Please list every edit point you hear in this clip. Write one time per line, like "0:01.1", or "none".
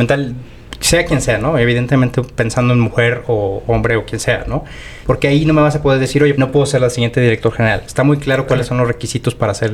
0:05.0
0:06.3